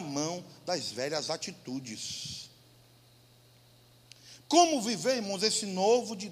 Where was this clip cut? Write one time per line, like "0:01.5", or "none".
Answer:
0:04.4